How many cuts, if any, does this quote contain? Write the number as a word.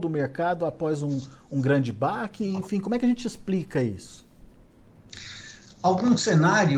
zero